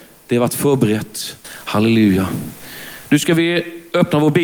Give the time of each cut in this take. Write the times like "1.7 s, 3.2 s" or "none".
1.4 s